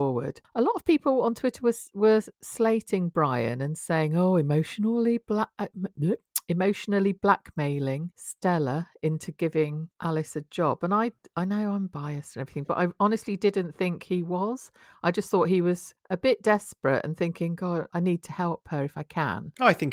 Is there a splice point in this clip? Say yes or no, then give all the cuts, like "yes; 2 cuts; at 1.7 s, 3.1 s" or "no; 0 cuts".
yes; 1 cut; at 17.9 s